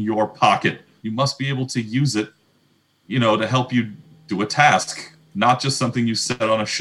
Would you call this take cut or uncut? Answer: cut